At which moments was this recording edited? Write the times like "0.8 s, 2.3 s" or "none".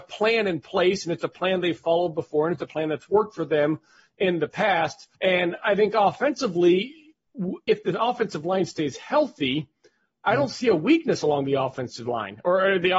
5.1 s, 7.7 s